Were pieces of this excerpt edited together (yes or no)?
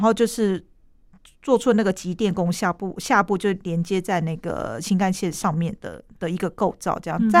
no